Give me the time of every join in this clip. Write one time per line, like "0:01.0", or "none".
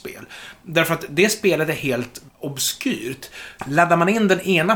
0:02.3
0:03.6